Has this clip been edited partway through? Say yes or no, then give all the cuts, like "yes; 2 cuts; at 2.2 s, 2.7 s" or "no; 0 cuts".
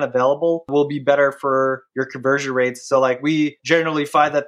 no; 0 cuts